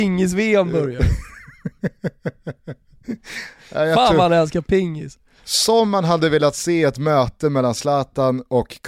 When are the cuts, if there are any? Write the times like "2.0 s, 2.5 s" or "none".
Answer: none